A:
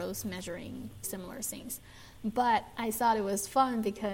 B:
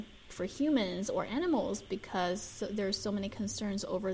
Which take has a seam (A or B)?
A